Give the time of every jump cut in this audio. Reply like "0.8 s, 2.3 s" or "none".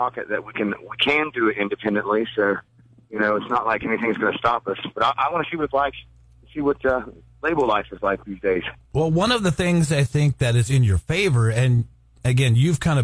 none